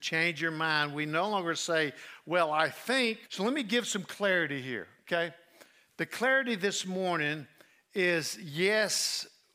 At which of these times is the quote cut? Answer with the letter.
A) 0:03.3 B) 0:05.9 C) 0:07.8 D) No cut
A